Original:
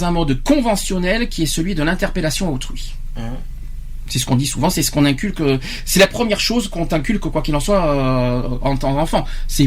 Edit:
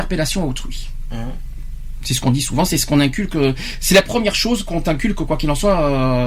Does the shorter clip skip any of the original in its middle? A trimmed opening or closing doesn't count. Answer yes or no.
no